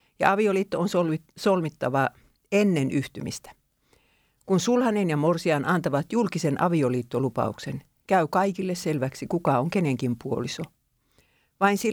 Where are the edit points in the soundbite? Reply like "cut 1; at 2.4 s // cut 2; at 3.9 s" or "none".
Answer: none